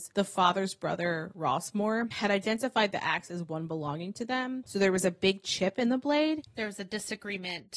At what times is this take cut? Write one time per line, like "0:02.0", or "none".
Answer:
0:04.6
0:06.5